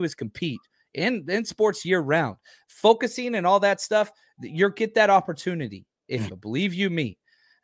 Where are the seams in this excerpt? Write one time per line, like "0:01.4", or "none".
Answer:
0:06.3